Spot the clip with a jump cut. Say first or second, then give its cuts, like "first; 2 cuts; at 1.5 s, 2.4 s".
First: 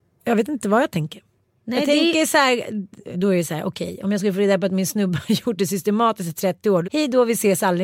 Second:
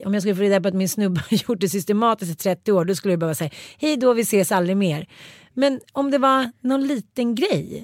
first; 2 cuts; at 3.1 s, 6.8 s